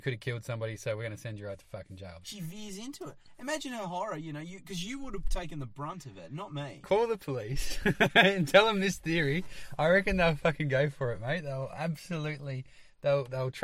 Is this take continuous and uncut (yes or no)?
no